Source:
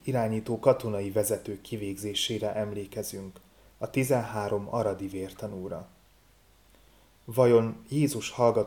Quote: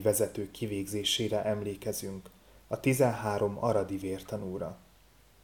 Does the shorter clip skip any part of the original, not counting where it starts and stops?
no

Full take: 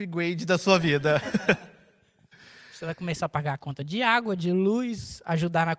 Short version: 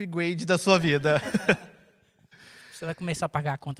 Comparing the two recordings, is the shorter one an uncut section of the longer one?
yes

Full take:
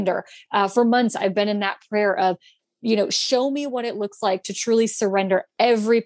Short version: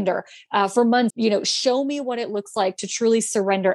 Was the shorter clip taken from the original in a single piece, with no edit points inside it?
no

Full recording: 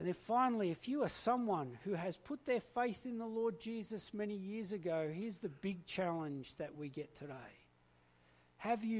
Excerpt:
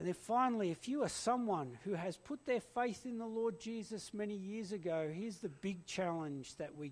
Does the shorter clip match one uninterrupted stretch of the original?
yes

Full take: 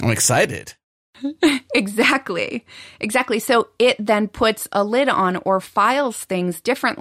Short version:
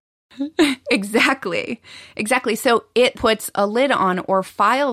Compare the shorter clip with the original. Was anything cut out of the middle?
yes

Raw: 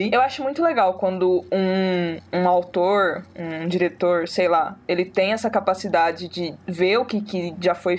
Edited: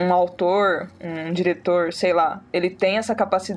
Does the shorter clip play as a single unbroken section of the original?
yes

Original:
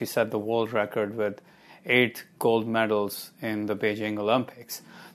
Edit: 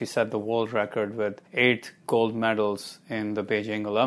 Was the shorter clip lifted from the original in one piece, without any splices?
no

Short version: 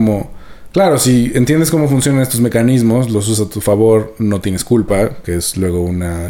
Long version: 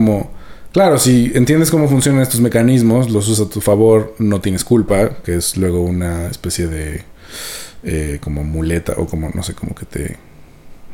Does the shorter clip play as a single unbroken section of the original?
yes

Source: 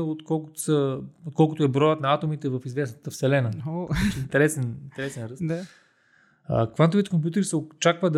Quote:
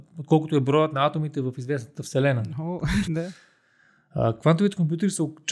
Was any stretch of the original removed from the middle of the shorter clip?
yes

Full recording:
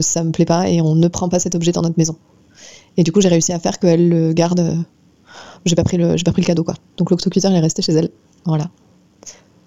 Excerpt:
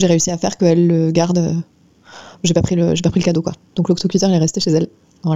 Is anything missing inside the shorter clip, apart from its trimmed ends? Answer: no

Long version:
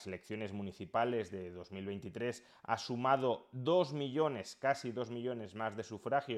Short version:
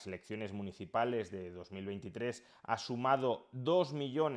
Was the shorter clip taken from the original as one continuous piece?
yes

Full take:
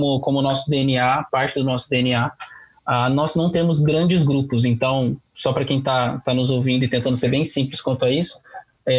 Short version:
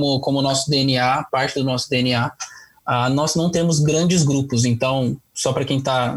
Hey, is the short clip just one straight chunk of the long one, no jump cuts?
yes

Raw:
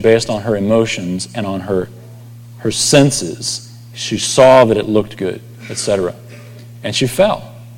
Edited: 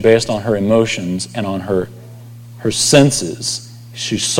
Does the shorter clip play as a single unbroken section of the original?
yes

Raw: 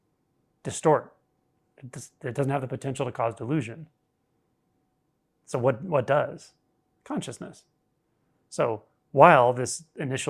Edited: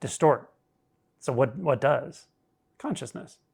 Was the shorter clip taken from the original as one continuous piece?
no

